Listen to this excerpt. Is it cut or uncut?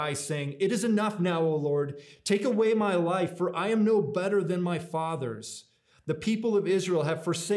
uncut